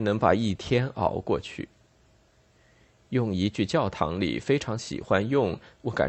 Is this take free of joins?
yes; 0 cuts

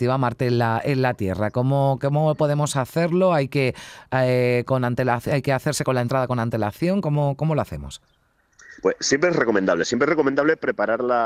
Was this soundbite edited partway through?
no; 0 cuts

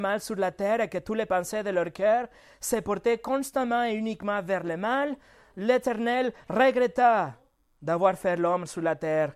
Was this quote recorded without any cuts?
yes; 0 cuts

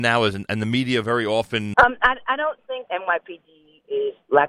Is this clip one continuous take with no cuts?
no; 2 cuts; at 1.7 s, 2.9 s

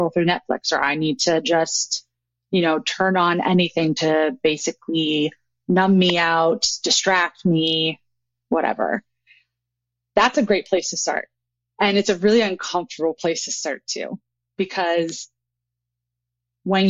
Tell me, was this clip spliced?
no; 0 cuts

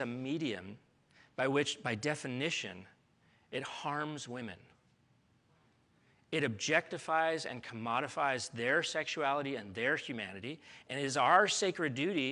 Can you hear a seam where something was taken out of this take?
no; 0 cuts

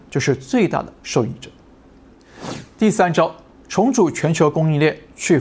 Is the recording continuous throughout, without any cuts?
yes; 0 cuts

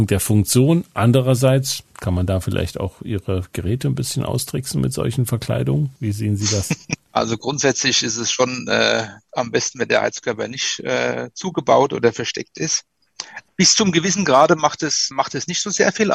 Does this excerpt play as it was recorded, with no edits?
no; 2 cuts; at 7.1 s, 15.1 s

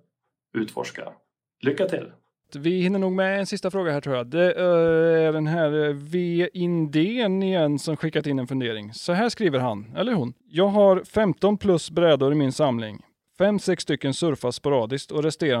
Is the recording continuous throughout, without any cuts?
no; 3 cuts; at 2.5 s, 10.4 s, 13.2 s

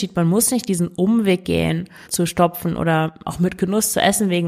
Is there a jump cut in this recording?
yes; 1 cut; at 2.0 s

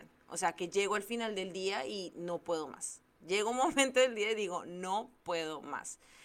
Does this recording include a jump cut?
yes; 1 cut; at 3.1 s

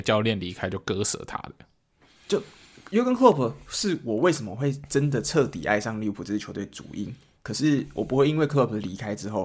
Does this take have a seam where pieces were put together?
no; 0 cuts

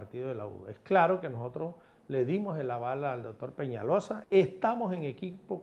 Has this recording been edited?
yes; 1 cut; at 4.2 s

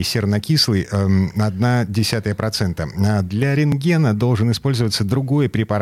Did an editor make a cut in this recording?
no; 0 cuts

